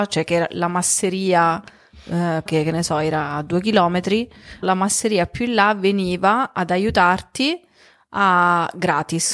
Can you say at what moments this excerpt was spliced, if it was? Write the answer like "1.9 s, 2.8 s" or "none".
2.5 s, 4.6 s